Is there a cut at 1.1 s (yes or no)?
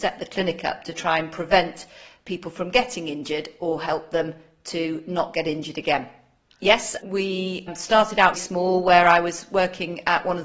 no